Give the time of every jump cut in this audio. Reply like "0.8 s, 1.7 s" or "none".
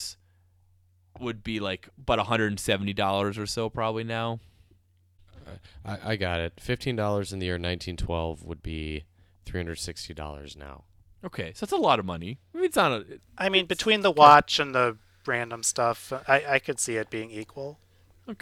none